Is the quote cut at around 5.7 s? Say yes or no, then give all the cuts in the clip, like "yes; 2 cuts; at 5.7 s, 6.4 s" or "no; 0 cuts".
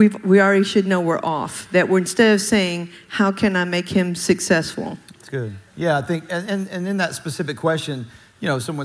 yes; 1 cut; at 5.7 s